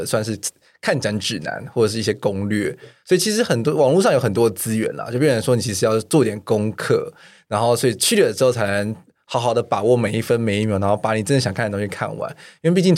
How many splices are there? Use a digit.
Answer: 0